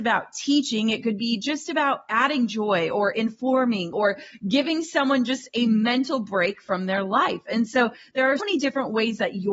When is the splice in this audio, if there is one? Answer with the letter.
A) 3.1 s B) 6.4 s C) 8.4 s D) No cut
C